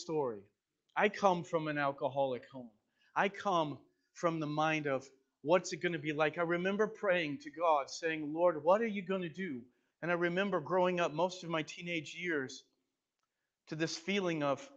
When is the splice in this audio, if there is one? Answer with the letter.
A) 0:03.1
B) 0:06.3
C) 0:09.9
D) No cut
C